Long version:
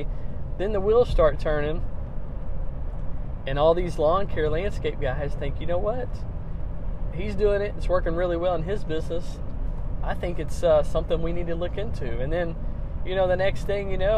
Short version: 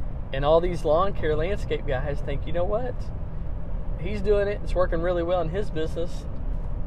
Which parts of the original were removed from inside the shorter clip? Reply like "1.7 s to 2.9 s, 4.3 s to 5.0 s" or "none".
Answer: none